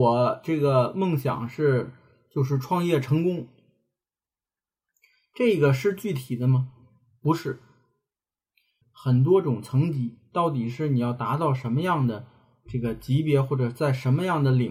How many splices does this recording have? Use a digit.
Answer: 1